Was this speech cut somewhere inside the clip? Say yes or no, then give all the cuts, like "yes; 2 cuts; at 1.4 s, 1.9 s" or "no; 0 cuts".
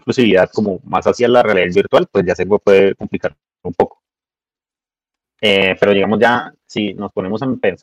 yes; 1 cut; at 5.2 s